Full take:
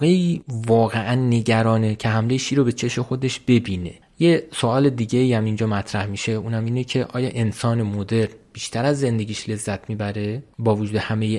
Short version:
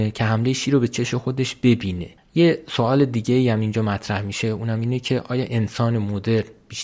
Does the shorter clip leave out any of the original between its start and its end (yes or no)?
no